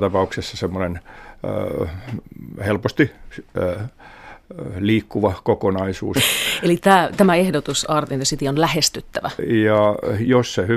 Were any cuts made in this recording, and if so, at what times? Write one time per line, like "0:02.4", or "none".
0:06.2
0:09.4